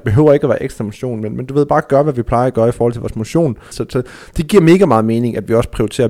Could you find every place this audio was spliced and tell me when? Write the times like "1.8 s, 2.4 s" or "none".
3.7 s